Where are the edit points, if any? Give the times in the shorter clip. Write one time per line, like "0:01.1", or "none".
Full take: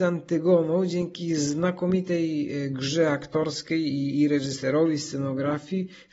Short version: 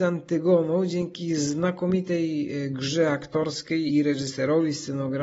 0:03.9